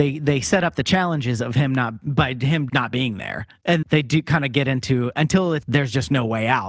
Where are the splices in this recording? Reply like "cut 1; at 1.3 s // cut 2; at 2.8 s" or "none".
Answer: cut 1; at 2.7 s // cut 2; at 3.8 s // cut 3; at 5.6 s